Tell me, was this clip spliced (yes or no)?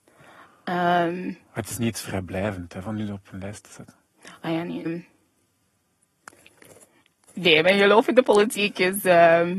yes